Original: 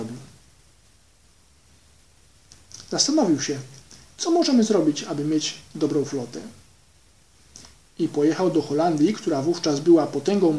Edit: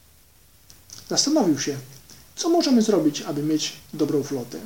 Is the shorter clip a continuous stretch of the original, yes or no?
yes